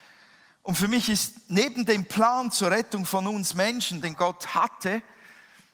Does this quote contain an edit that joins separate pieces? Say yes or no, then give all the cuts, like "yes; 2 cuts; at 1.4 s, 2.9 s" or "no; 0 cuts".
yes; 1 cut; at 4.0 s